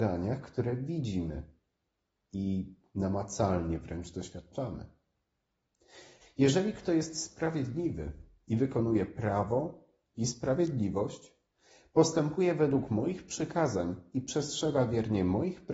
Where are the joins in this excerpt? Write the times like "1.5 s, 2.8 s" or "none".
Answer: 6.2 s